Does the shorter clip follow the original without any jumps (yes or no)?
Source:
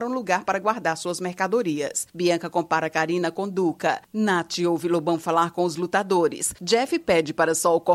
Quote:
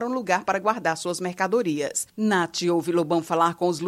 no